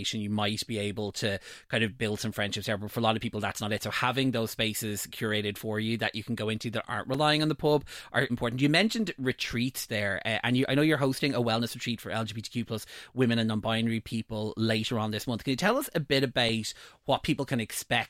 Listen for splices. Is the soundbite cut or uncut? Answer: cut